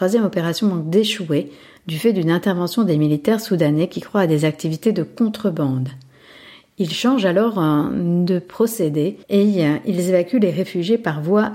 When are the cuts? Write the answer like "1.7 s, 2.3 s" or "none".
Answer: 9.2 s